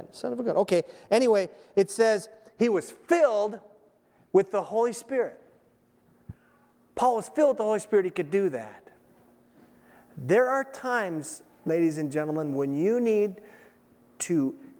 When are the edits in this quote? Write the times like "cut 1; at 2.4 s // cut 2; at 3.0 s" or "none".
none